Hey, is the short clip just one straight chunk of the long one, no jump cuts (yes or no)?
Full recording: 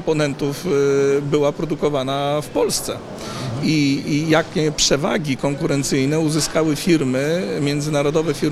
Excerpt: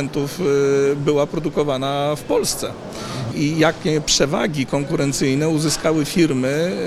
no